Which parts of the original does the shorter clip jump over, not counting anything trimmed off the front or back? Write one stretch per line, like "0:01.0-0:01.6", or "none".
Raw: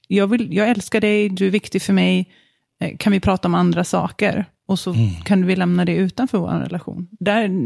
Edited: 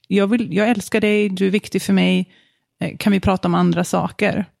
none